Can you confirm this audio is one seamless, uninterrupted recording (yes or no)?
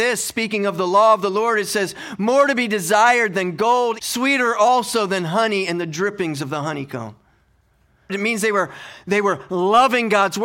no